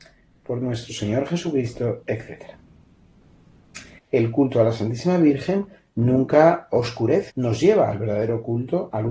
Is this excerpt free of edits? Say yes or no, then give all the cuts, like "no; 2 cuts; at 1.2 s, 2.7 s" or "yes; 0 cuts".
no; 2 cuts; at 4.0 s, 7.3 s